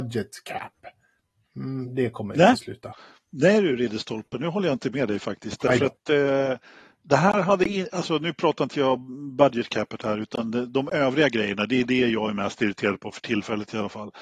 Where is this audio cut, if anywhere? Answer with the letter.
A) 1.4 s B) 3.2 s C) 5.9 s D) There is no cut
D